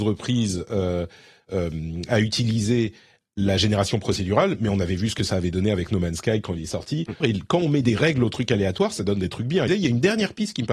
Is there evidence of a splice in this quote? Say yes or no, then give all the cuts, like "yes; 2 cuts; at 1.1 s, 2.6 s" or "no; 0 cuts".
yes; 2 cuts; at 7.2 s, 9.7 s